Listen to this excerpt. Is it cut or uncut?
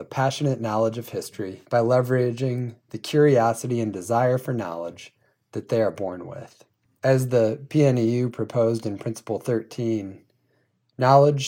uncut